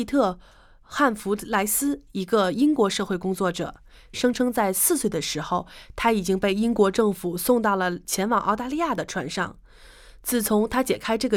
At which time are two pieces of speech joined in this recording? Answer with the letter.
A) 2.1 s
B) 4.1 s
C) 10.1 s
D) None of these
B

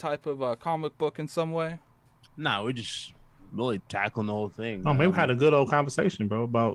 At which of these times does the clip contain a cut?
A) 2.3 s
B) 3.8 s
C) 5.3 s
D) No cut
B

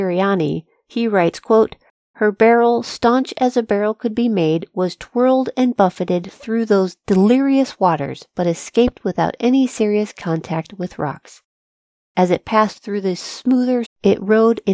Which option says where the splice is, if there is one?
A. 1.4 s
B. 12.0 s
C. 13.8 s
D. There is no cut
C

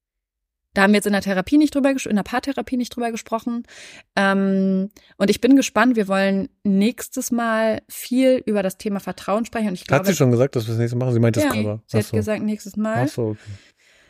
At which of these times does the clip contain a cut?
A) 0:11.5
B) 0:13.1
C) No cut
A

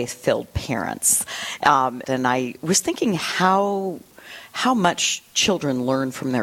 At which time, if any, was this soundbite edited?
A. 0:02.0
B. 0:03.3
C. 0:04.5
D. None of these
A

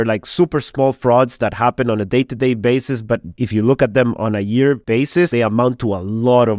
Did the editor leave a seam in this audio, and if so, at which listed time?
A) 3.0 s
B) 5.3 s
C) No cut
B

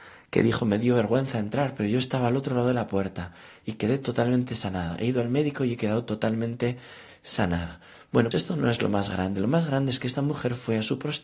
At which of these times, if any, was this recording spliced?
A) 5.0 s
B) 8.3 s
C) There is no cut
B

